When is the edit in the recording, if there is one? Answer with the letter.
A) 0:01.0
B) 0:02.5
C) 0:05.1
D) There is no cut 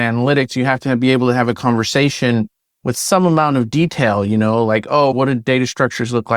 C